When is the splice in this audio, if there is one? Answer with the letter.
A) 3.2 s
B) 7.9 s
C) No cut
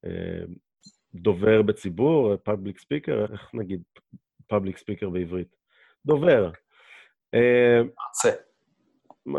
A